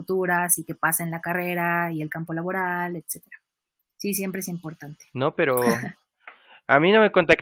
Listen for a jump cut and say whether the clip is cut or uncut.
uncut